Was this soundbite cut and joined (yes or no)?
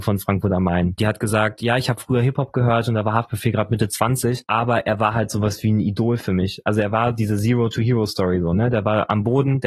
yes